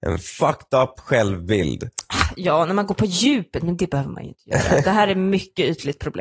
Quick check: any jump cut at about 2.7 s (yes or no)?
no